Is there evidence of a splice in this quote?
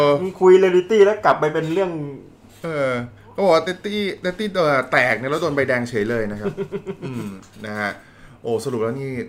no; 0 cuts

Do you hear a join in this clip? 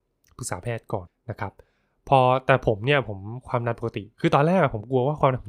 yes; 1 cut; at 1.1 s

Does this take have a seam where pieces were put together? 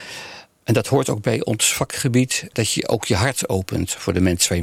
yes; 1 cut; at 2.5 s

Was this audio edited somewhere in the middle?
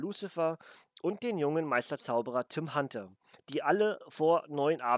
no; 0 cuts

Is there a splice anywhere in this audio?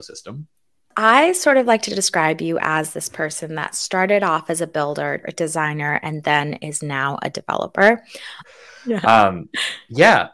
yes; 2 cuts; at 5.2 s, 8.4 s

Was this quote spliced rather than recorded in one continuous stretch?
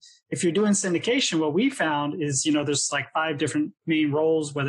no; 0 cuts

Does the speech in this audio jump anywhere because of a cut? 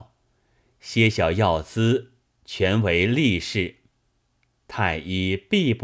no; 0 cuts

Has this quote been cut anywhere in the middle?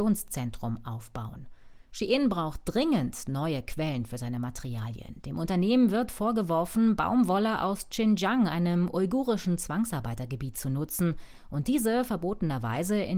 no; 0 cuts

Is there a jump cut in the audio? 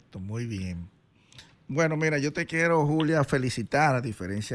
no; 0 cuts

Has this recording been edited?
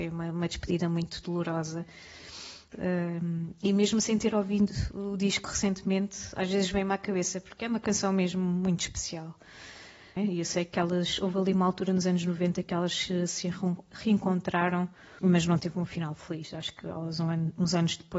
yes; 3 cuts; at 2.7 s, 10.2 s, 15.2 s

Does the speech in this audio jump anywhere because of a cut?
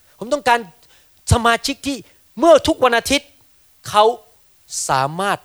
no; 0 cuts

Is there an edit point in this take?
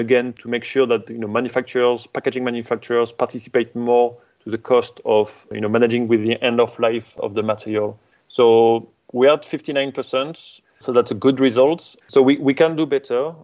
yes; 2 cuts; at 10.6 s, 12.0 s

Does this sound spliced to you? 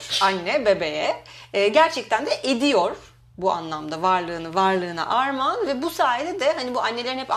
no; 0 cuts

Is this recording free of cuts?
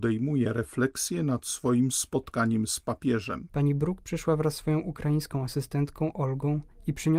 no; 1 cut; at 3.5 s

